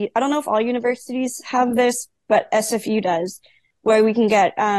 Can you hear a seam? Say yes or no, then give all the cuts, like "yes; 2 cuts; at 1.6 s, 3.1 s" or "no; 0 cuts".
no; 0 cuts